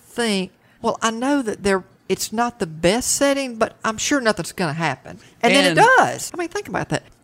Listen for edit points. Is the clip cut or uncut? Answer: cut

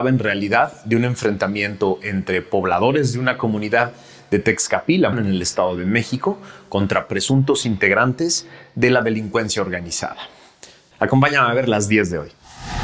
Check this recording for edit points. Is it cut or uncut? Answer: cut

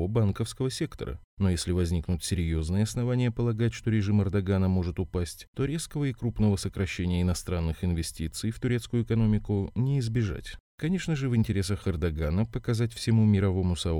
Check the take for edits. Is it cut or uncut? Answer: cut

